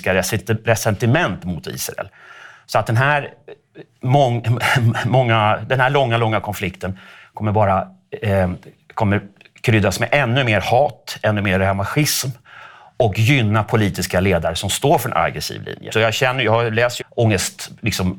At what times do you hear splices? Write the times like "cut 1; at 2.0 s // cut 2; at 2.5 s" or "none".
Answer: cut 1; at 15.9 s // cut 2; at 17.0 s